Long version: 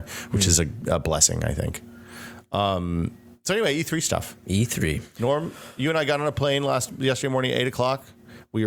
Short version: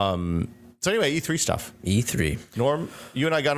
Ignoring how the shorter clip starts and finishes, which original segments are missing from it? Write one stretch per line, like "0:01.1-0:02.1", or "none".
none